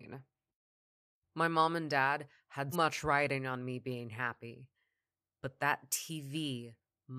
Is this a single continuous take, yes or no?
no